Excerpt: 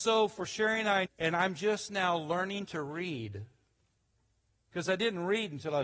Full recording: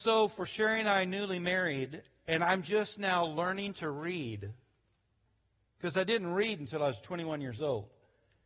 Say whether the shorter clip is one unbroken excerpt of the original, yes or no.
no